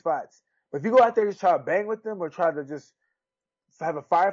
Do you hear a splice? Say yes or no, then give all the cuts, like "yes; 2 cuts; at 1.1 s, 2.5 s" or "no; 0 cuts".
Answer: no; 0 cuts